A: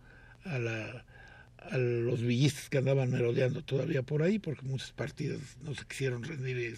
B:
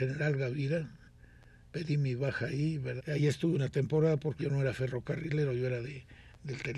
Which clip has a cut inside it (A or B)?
B